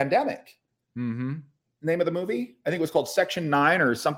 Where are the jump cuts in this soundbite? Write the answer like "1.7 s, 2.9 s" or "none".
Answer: 1.6 s